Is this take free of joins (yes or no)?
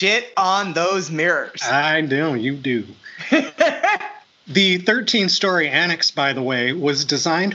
yes